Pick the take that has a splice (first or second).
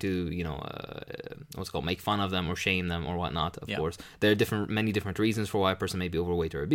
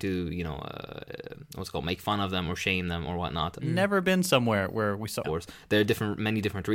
second